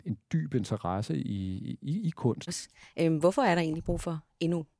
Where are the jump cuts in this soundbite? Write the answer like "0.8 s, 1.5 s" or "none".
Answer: 2.5 s